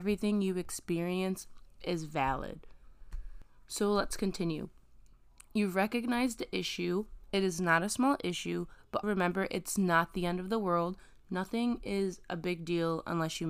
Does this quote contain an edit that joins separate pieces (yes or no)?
yes